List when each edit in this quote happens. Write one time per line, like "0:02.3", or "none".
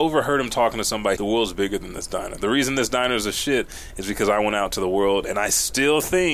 0:01.2